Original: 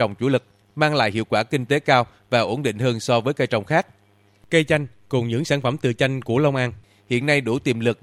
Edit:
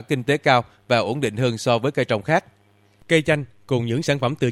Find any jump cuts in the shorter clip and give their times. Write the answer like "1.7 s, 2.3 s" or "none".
none

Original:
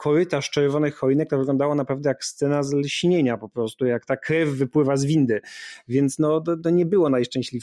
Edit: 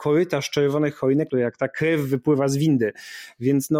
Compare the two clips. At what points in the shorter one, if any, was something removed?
1.3 s

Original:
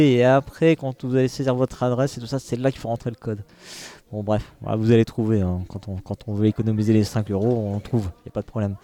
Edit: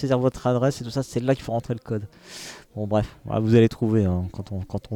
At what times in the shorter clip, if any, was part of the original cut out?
none

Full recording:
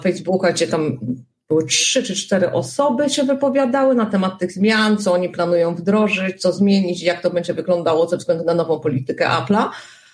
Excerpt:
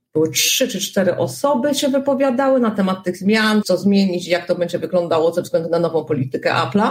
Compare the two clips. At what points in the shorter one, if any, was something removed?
3.6 s

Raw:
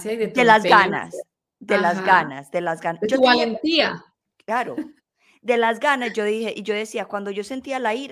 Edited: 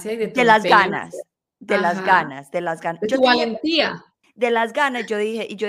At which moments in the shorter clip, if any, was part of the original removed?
4.2 s

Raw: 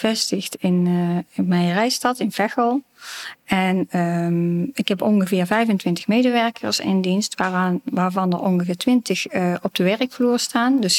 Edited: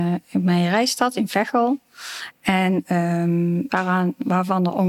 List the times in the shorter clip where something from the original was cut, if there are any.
3.7 s

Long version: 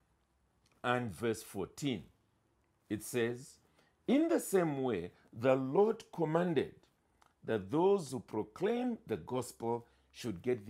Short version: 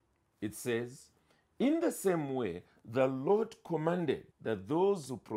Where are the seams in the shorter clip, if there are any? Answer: 4.3 s

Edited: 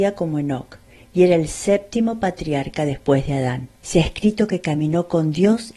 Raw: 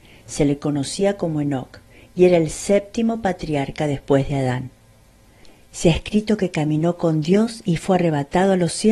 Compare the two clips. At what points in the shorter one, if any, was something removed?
3.8 s

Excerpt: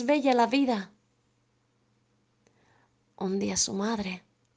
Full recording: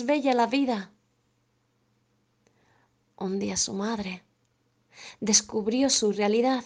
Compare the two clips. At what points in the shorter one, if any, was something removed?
none

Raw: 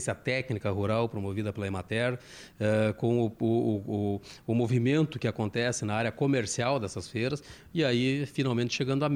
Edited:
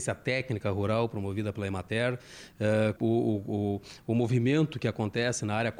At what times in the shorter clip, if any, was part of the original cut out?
3.0 s

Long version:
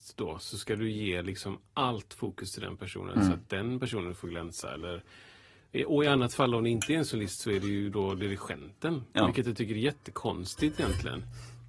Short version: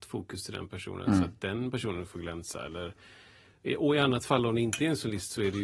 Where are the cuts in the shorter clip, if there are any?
none

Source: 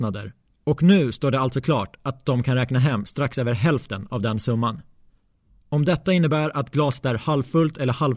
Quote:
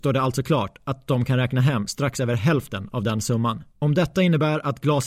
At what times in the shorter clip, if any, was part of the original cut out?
3.7 s

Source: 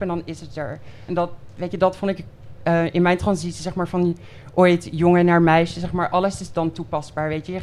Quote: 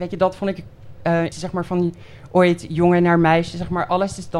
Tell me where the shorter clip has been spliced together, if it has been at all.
1.3 s

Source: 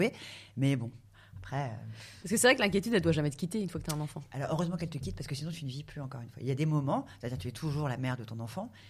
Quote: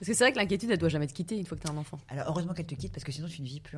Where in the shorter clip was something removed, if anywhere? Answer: none

